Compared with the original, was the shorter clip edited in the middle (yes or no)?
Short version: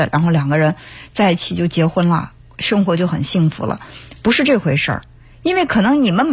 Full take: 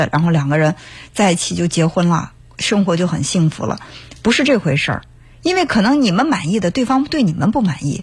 no